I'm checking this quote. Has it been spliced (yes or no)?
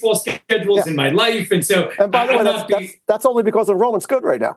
no